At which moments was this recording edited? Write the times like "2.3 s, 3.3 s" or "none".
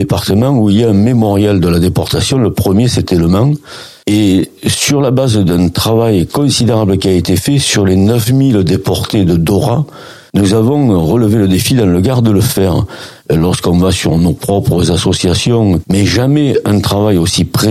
13.2 s, 15.8 s